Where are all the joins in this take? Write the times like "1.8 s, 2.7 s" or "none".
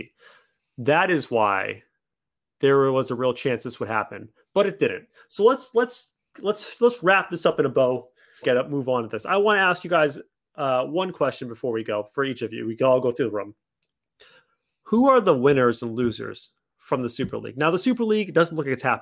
8.4 s